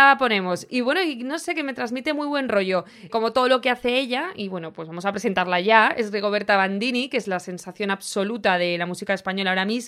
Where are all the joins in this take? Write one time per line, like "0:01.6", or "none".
0:03.1